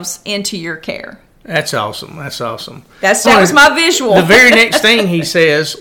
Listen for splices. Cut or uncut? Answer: cut